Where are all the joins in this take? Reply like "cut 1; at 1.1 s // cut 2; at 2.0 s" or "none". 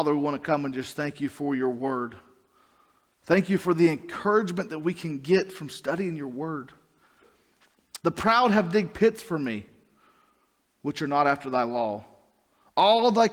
cut 1; at 8.0 s